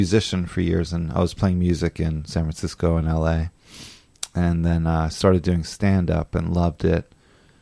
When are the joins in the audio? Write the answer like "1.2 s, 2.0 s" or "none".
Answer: none